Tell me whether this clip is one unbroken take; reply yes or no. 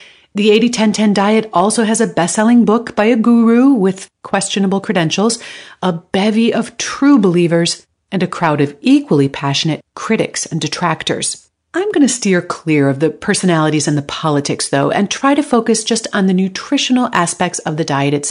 yes